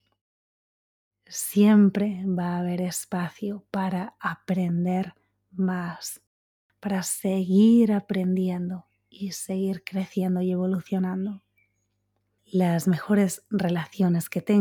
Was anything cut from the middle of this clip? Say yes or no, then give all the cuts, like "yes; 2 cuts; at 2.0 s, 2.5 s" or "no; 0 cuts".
yes; 1 cut; at 1.1 s